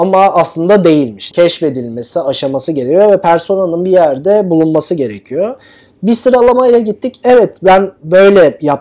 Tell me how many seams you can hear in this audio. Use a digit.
1